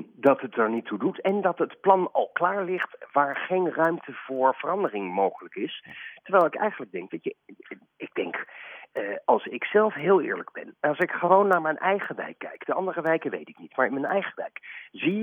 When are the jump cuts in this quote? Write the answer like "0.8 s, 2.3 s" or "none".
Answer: none